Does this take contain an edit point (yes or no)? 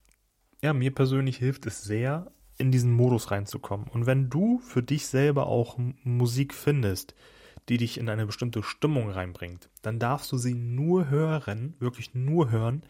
no